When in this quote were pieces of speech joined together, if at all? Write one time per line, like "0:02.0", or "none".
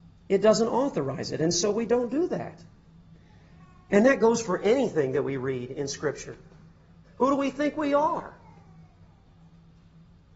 0:07.0